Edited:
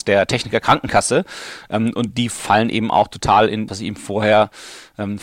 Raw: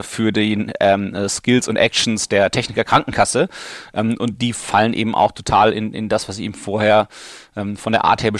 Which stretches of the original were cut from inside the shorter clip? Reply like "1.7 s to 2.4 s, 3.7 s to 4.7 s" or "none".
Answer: 5.9 s to 6.3 s